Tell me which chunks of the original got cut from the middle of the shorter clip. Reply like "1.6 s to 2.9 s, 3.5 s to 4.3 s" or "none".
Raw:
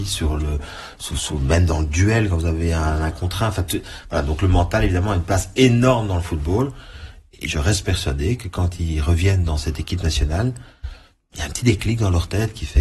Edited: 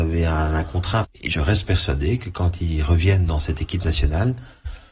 3.5 s to 7.2 s